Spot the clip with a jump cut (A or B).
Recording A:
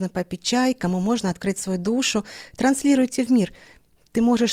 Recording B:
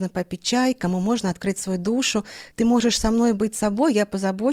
B